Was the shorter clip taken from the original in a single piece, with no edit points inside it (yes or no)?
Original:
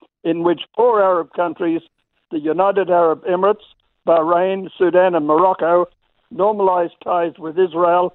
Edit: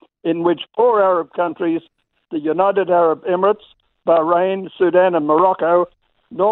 yes